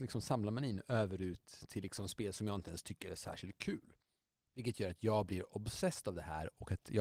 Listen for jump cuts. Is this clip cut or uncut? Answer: cut